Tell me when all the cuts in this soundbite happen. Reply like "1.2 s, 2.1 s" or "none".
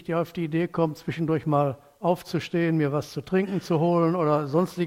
none